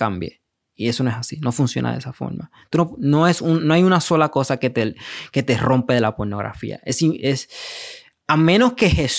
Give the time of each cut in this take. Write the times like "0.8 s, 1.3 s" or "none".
none